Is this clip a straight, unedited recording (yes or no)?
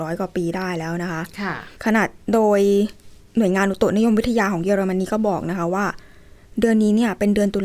no